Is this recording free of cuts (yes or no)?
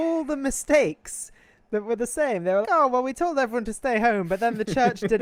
no